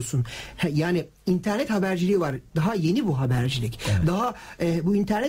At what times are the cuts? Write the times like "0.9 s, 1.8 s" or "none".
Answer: none